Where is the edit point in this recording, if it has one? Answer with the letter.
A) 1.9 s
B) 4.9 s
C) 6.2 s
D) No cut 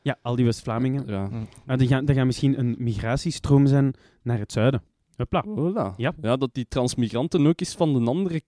D